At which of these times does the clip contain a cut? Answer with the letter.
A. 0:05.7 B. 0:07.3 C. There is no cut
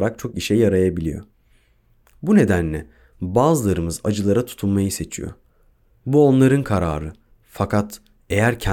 B